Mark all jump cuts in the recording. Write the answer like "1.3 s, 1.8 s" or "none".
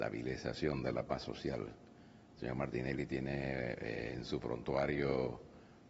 none